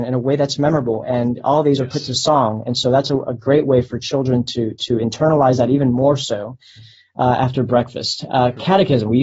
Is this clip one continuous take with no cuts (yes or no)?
no